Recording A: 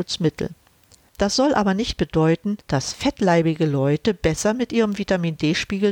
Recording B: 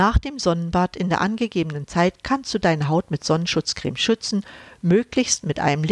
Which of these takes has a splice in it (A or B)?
A